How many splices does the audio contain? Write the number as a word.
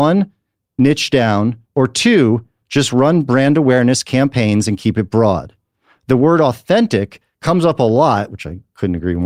one